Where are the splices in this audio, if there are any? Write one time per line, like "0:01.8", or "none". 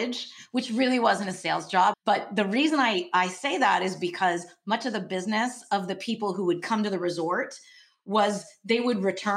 0:01.9